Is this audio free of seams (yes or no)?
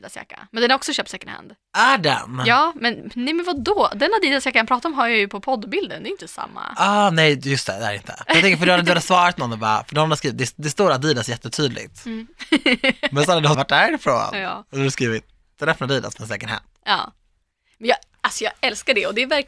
no